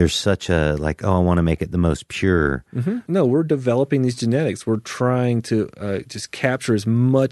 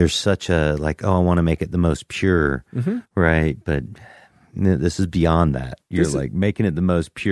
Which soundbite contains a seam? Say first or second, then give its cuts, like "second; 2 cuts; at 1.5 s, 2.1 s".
first; 1 cut; at 3.0 s